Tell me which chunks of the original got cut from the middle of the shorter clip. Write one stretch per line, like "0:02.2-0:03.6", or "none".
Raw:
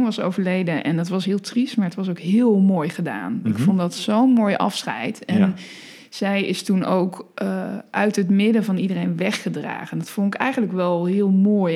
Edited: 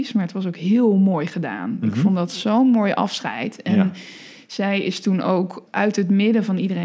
0:07.3-0:07.9